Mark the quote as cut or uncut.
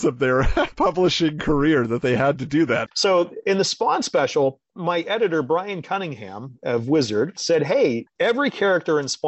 cut